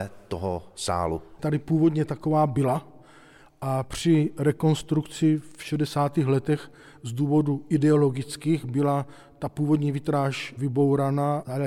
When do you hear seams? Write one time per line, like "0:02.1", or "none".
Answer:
none